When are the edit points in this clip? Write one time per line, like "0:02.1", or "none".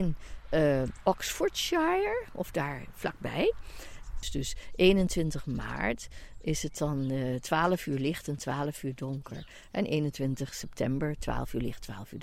0:04.2